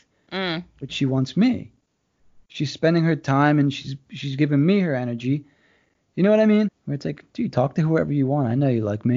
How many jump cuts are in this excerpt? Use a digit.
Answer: 1